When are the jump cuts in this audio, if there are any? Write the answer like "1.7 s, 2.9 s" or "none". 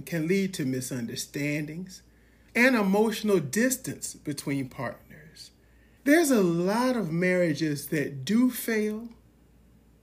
2.5 s, 6.0 s